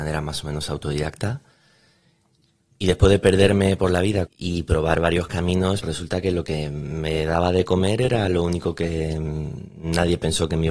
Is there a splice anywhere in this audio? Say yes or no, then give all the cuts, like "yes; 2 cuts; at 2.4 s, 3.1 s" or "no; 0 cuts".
yes; 2 cuts; at 4.3 s, 5.8 s